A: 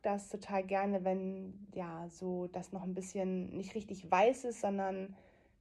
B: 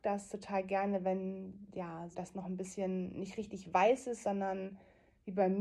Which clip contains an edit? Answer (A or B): B